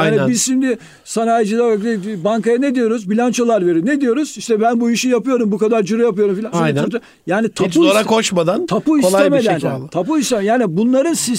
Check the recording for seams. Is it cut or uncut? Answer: cut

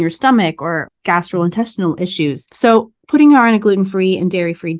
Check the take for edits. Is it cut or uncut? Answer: cut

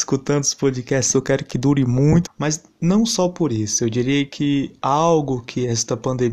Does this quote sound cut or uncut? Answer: cut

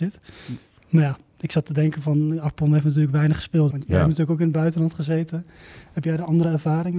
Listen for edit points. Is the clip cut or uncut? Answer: cut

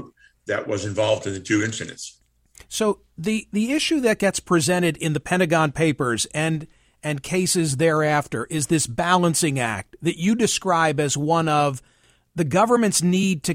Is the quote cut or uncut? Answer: uncut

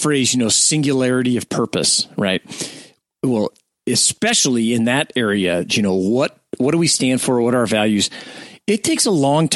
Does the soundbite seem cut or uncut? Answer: cut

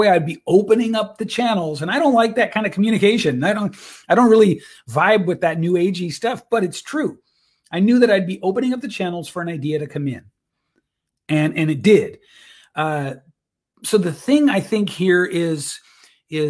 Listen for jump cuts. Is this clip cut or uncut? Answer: uncut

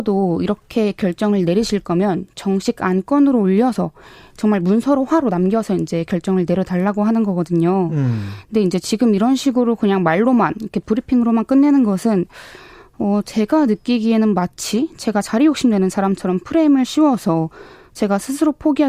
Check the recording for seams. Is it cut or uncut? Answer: uncut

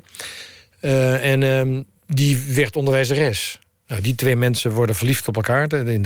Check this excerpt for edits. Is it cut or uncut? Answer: cut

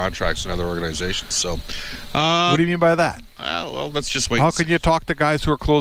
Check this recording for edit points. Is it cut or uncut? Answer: uncut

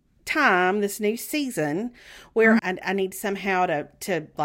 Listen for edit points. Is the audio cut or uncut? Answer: cut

